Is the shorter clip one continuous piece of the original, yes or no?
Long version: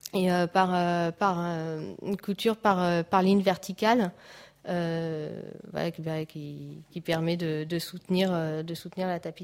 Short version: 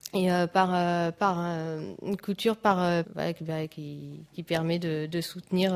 no